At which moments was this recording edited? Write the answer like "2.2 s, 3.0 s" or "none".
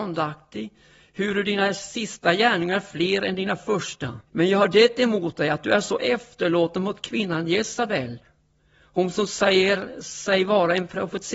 4.3 s